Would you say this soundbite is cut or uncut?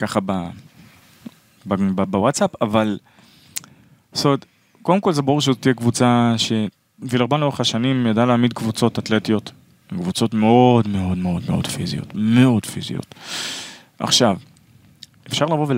uncut